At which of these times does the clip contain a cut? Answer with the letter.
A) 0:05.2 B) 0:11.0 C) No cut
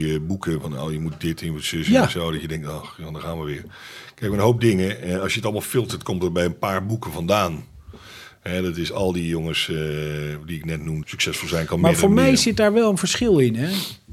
B